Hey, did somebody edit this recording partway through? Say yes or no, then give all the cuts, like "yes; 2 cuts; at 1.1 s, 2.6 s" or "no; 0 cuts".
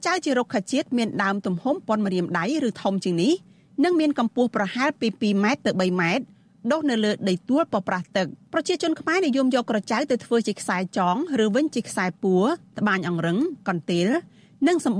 yes; 1 cut; at 8.4 s